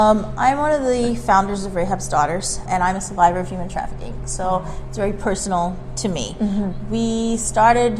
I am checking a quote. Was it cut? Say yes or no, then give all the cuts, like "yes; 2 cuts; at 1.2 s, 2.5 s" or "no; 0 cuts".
yes; 1 cut; at 2.7 s